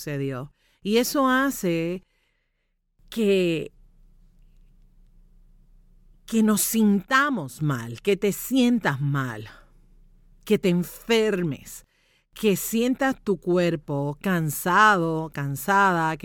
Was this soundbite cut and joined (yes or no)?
no